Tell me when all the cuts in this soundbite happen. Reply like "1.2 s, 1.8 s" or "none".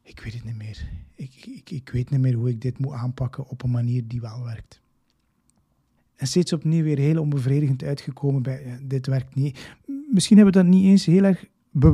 6.0 s

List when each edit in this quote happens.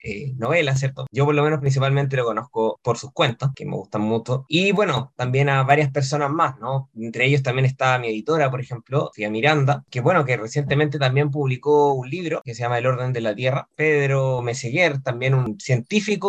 none

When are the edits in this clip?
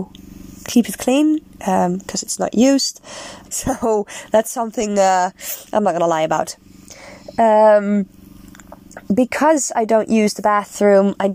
3.5 s, 9.0 s

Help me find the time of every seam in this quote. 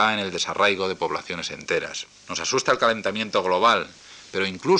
2.2 s

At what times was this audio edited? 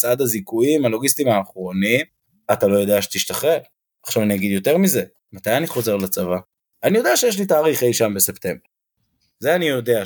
5.2 s

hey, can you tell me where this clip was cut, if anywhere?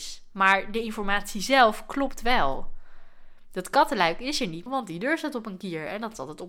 4.7 s

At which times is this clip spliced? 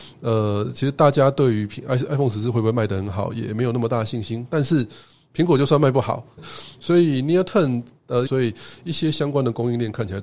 6.4 s, 8.3 s

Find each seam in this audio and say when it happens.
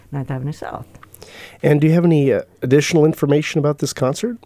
2.5 s

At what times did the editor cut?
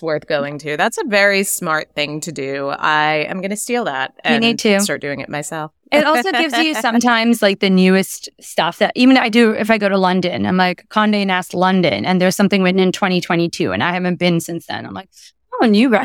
none

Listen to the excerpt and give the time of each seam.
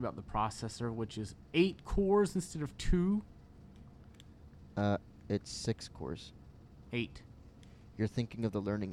none

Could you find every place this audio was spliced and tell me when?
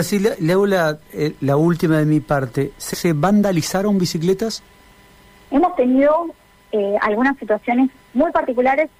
2.9 s

